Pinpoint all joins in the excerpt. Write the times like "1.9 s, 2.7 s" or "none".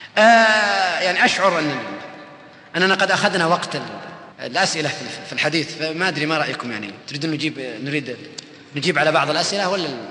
4.3 s, 7.0 s